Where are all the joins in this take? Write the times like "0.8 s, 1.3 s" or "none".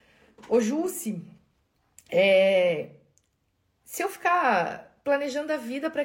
none